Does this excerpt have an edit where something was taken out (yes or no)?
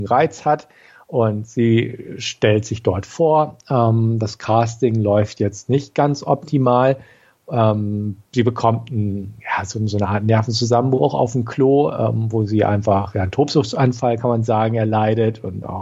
no